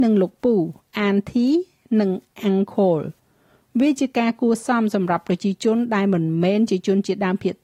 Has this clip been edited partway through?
no; 0 cuts

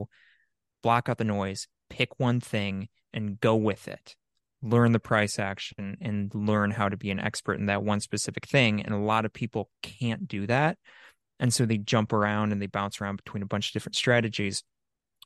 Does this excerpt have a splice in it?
no; 0 cuts

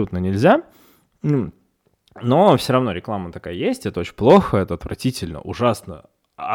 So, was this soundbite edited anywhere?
no; 0 cuts

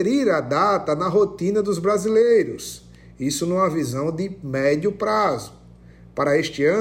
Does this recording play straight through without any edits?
yes; 0 cuts

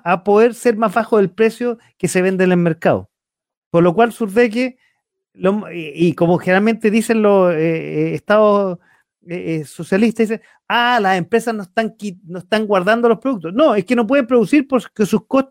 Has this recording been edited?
no; 0 cuts

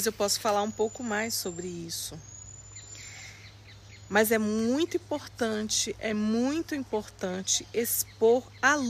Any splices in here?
no; 0 cuts

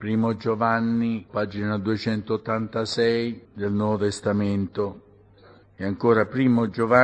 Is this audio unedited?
no; 3 cuts; at 1.3 s, 3.4 s, 5.6 s

